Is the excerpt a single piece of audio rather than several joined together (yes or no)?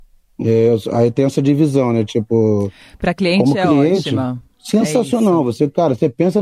yes